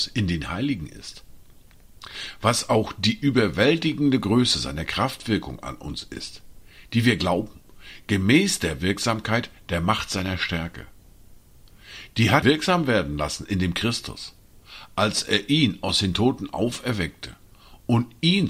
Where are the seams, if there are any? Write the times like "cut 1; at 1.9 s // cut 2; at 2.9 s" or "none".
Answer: cut 1; at 12.4 s